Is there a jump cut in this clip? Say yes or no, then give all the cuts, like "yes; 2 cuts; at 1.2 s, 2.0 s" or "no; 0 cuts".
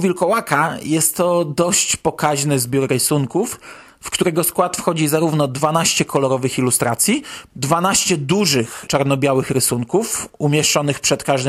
yes; 2 cuts; at 7.5 s, 8.9 s